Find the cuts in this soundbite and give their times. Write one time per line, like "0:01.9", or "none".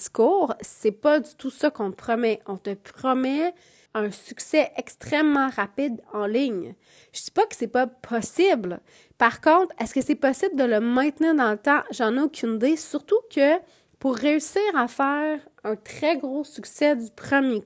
0:03.9

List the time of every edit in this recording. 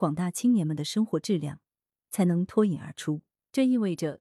0:02.0

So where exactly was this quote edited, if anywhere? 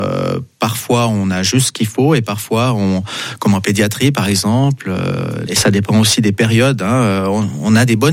0:05.5

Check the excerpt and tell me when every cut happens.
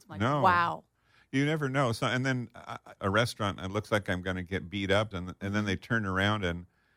0:03.0
0:05.1

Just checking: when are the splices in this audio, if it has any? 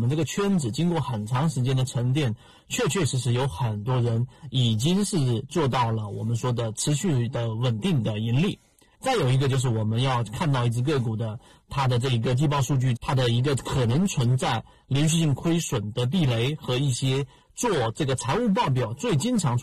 0:08.9
0:13.0

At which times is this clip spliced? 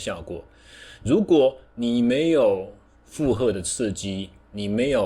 none

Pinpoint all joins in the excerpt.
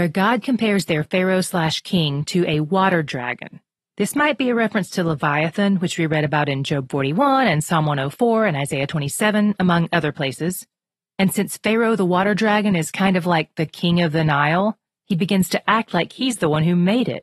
none

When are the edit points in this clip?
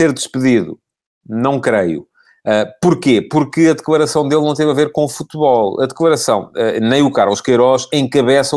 none

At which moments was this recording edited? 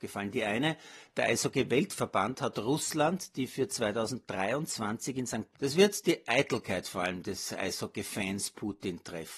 0:05.5

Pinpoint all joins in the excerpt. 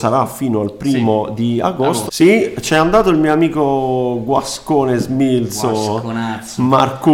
0:02.1

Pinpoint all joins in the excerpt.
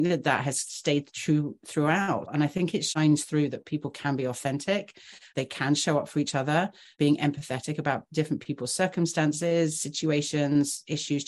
0:02.3

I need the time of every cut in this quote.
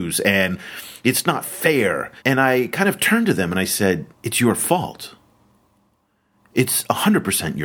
0:02.2
0:04.1

